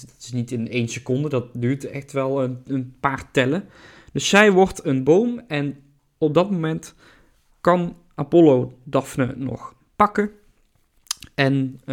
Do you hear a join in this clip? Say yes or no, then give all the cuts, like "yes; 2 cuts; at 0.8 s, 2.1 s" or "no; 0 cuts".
no; 0 cuts